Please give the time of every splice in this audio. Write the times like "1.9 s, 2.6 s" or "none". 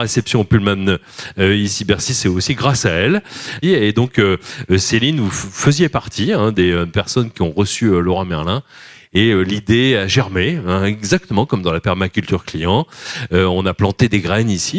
3.6 s